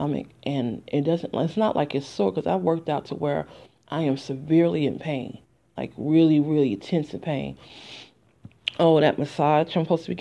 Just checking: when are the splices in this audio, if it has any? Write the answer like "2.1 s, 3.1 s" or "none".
none